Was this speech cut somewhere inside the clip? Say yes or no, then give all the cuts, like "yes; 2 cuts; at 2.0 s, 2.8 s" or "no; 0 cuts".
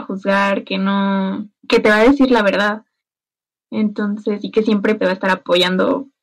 yes; 2 cuts; at 1.6 s, 5.0 s